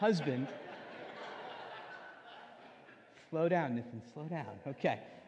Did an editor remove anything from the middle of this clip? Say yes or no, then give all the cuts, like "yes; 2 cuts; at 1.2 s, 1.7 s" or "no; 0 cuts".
no; 0 cuts